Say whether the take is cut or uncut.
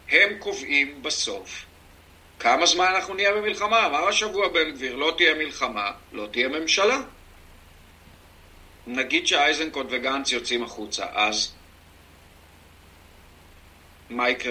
uncut